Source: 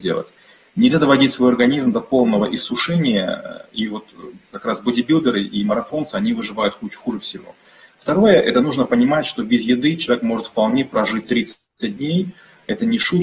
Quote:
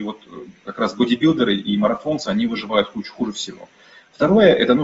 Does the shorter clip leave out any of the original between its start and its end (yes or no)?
no